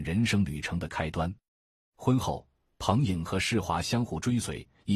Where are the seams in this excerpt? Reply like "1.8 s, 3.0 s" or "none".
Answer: none